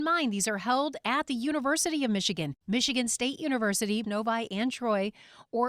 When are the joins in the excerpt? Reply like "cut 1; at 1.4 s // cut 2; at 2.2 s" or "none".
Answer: cut 1; at 2.6 s // cut 2; at 4.0 s